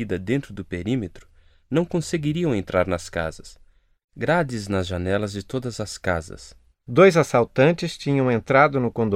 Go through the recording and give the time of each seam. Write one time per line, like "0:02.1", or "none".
0:04.0
0:06.7